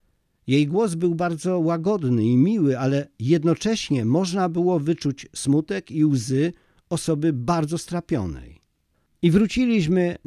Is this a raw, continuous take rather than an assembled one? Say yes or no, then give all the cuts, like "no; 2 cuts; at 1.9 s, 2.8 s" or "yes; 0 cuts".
no; 1 cut; at 9.1 s